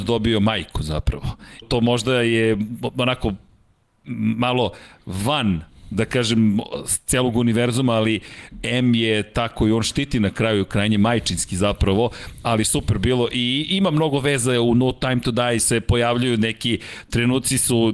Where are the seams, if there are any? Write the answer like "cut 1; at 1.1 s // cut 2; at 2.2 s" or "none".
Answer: cut 1; at 1.6 s // cut 2; at 15.6 s